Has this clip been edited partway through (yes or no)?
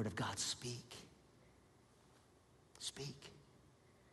no